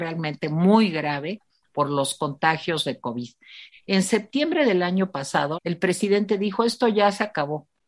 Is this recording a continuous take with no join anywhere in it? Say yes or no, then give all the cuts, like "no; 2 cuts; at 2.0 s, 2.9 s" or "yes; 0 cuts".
no; 2 cuts; at 3.7 s, 5.5 s